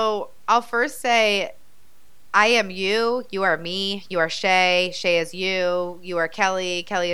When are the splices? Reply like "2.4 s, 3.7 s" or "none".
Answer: none